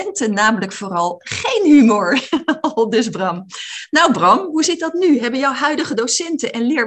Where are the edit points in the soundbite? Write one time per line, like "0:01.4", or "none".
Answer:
none